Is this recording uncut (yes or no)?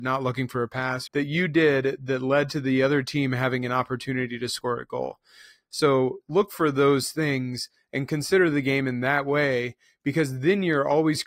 no